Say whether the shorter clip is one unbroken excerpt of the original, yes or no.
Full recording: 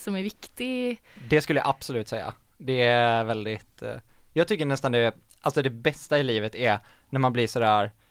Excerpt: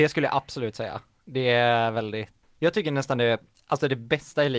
no